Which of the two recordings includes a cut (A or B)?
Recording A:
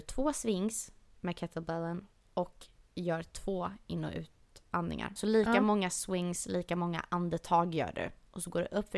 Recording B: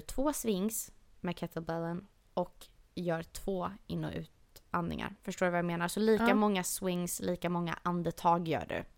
A